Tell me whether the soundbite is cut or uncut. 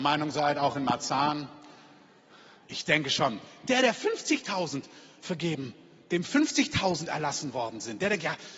uncut